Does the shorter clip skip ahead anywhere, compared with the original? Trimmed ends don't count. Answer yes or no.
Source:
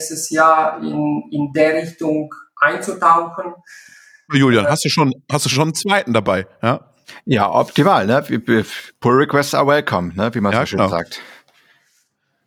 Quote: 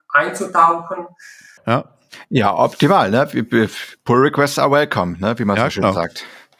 yes